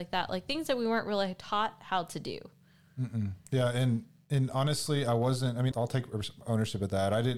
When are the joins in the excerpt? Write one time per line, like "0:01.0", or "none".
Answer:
0:05.7